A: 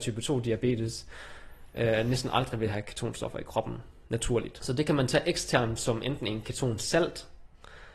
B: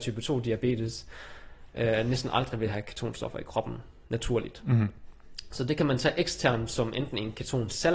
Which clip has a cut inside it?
A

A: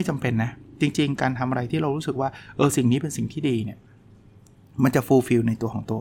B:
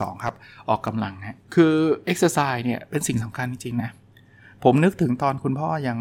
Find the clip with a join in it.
B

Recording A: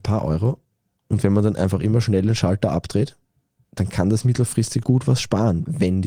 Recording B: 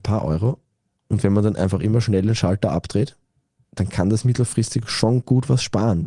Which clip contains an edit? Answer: A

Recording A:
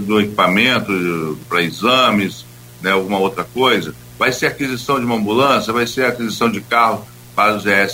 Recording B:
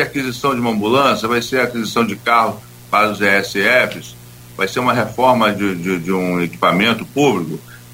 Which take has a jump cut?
B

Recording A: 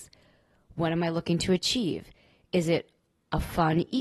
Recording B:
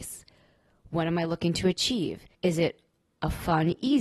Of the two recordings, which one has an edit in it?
B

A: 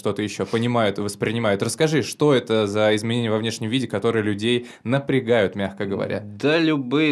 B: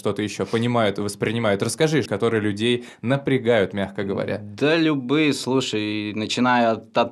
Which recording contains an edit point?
B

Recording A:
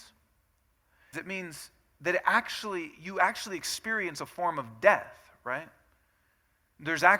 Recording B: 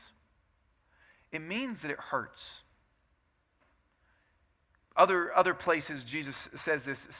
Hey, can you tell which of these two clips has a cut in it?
A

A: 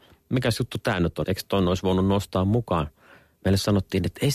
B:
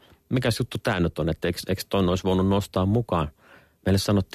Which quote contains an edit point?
A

